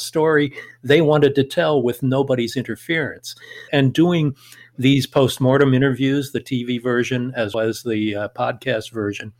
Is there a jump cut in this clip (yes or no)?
yes